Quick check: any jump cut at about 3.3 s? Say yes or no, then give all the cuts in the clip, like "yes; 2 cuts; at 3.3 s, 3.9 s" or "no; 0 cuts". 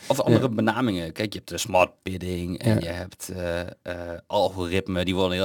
no; 0 cuts